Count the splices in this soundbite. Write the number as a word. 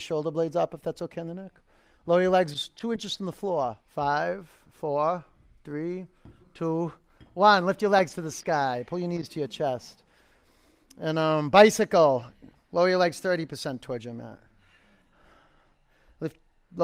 two